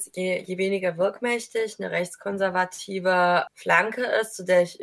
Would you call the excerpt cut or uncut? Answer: cut